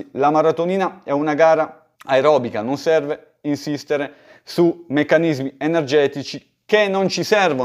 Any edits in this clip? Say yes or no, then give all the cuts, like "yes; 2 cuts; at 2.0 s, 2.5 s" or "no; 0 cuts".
yes; 1 cut; at 1.9 s